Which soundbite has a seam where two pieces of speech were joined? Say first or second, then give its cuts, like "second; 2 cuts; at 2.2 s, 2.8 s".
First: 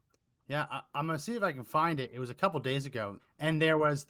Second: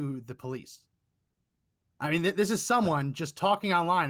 first; 1 cut; at 3.2 s